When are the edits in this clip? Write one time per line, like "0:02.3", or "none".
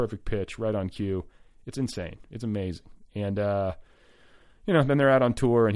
none

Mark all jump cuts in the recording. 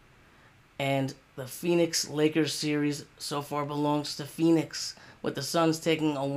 none

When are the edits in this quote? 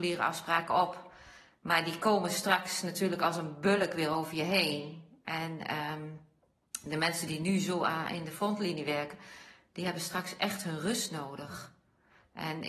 none

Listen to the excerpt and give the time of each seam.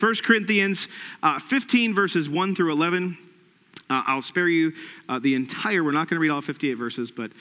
none

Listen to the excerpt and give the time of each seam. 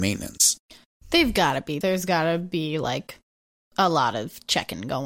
0:01.8

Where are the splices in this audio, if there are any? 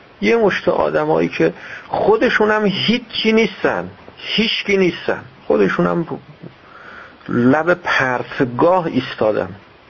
0:05.4

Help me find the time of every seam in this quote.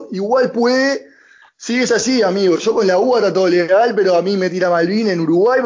none

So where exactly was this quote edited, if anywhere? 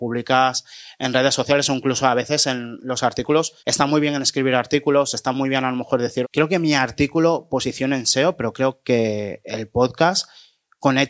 0:03.6
0:06.2

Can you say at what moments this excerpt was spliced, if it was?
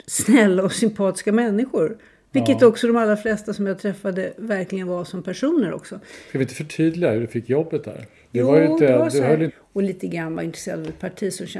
0:09.5

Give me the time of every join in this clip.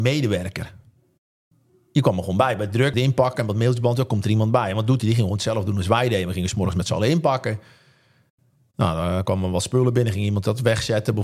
0:02.9

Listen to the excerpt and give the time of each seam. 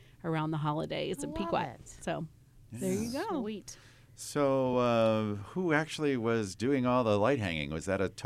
none

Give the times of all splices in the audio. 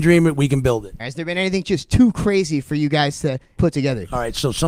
0:01.0
0:03.6

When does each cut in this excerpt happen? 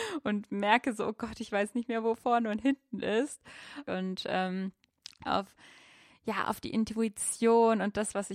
0:03.9
0:05.2

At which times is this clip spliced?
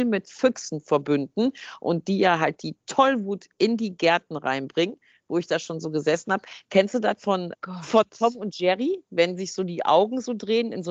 0:07.5

